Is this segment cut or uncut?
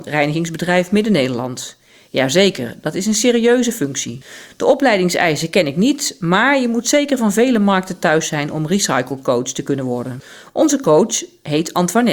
uncut